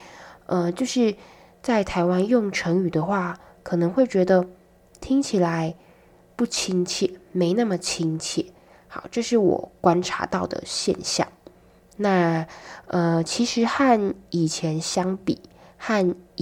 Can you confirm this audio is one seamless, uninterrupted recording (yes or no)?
yes